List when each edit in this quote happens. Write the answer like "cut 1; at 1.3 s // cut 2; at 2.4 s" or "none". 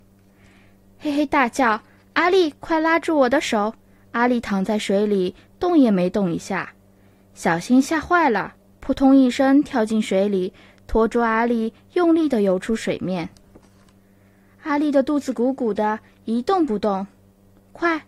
none